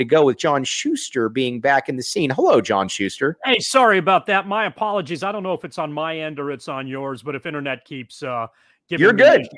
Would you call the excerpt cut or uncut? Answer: uncut